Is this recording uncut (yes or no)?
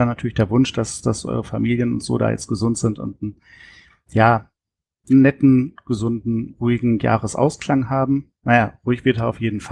yes